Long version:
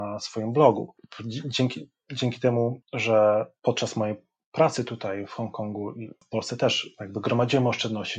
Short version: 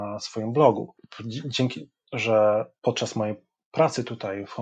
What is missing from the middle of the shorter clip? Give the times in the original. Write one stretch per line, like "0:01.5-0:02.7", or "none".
0:02.0-0:02.8